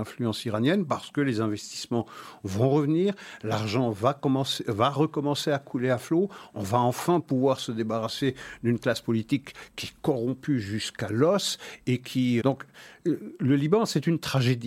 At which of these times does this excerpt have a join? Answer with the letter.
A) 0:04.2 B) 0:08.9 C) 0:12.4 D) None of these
C